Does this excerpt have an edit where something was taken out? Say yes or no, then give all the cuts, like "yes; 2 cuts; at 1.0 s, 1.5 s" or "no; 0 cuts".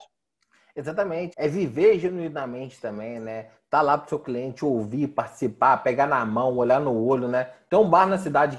yes; 1 cut; at 1.3 s